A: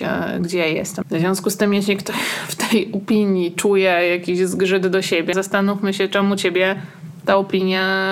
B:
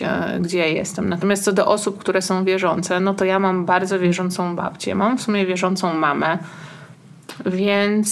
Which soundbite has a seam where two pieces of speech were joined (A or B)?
A